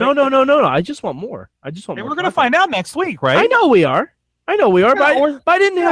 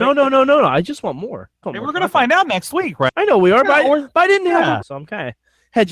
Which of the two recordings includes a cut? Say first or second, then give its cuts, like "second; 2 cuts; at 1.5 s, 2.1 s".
second; 3 cuts; at 1.6 s, 3.1 s, 4.8 s